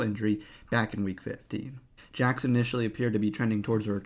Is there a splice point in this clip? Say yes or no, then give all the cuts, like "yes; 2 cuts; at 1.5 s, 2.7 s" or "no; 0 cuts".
yes; 1 cut; at 2.0 s